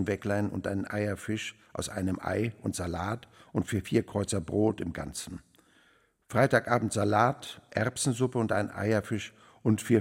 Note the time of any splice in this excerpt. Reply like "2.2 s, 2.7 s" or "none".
none